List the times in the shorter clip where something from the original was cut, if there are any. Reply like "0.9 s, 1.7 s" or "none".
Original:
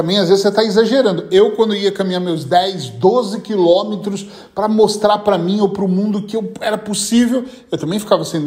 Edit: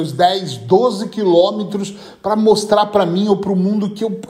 none